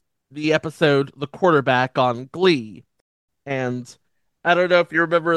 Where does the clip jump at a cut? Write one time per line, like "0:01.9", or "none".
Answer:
0:03.4